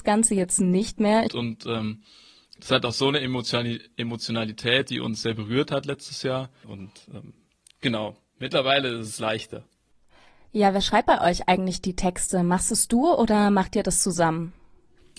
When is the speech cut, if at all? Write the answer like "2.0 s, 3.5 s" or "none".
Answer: 1.3 s, 6.6 s